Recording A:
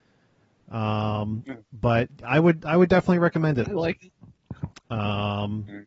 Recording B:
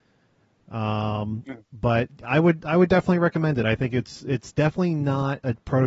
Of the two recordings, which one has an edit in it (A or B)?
A